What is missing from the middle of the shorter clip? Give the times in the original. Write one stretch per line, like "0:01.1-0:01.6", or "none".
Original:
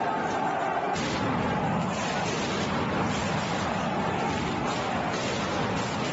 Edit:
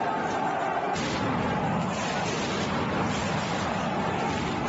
none

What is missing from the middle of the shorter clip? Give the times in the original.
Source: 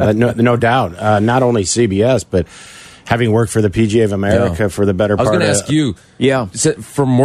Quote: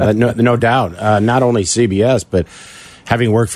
none

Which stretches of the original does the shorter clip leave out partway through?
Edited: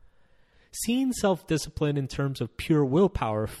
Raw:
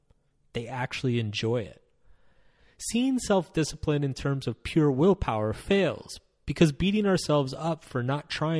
none

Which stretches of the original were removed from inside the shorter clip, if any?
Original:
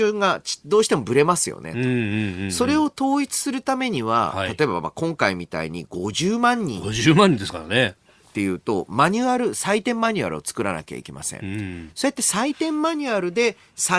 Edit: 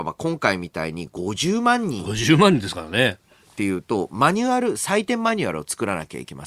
none

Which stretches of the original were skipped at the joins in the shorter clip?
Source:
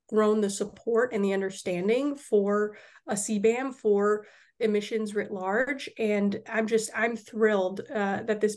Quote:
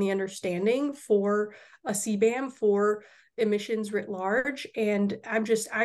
none

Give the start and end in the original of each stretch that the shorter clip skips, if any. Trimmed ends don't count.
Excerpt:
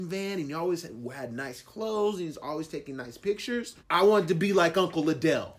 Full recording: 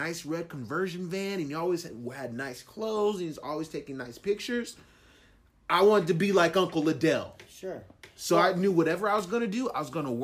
0:04.8-0:05.6

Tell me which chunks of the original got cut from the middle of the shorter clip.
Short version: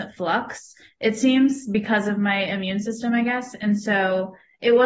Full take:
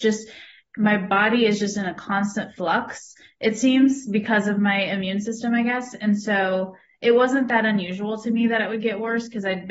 none

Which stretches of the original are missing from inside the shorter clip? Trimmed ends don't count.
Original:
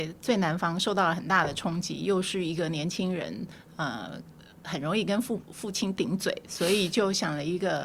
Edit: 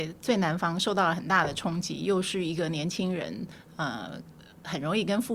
none

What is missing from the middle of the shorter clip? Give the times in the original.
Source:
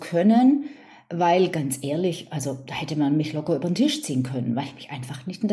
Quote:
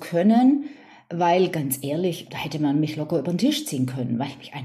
0:02.3-0:02.7

